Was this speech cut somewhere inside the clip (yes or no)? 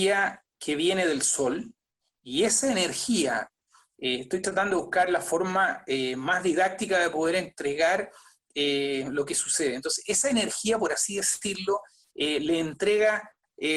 no